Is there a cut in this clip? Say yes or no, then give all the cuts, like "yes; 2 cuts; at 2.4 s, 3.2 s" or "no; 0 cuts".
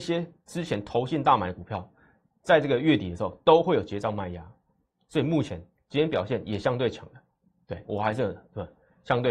yes; 2 cuts; at 5.7 s, 7.8 s